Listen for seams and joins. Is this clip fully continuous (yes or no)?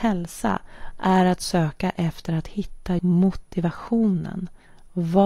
no